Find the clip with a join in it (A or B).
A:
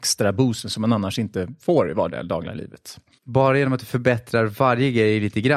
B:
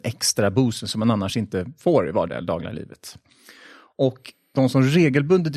A